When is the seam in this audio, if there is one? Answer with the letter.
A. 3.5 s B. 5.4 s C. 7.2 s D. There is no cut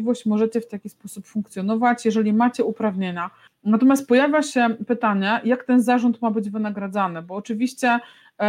A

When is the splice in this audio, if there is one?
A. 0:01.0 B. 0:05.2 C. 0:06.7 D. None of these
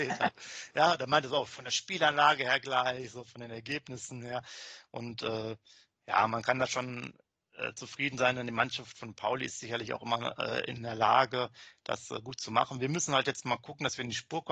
D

